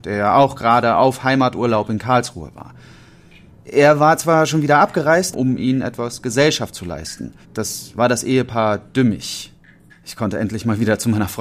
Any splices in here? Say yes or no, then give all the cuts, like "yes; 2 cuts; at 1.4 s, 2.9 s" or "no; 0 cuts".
yes; 3 cuts; at 5.3 s, 7.4 s, 9.9 s